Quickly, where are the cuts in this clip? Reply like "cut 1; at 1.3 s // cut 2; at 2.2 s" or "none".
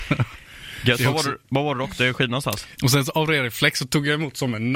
cut 1; at 2.8 s